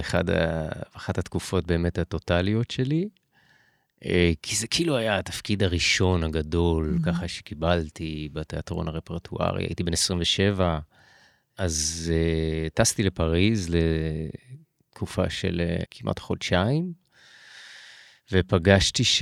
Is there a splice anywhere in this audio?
yes; 1 cut; at 15.9 s

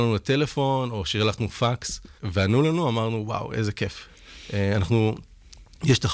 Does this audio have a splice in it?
yes; 1 cut; at 2.2 s

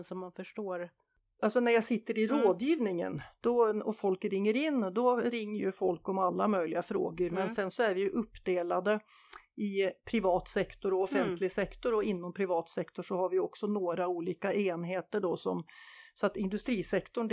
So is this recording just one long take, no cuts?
yes; 0 cuts

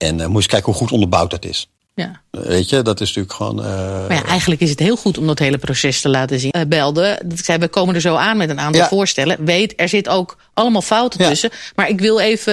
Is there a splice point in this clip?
yes; 1 cut; at 6.5 s

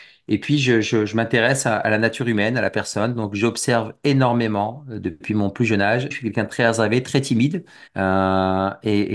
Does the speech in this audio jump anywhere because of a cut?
yes; 2 cuts; at 6.1 s, 7.9 s

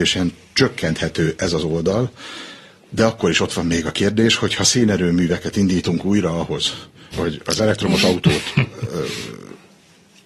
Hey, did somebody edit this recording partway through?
yes; 1 cut; at 7.1 s

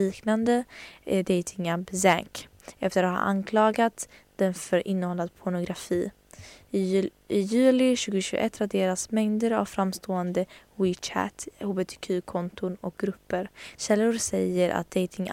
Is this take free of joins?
no; 1 cut; at 13.7 s

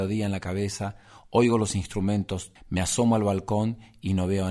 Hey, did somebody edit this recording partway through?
yes; 1 cut; at 2.6 s

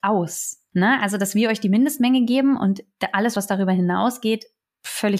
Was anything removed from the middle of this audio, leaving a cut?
no; 0 cuts

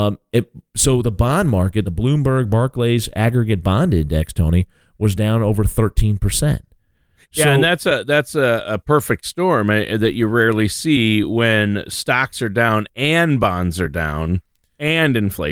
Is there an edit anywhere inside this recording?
no; 0 cuts

